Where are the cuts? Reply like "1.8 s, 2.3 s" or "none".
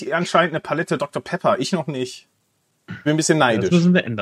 none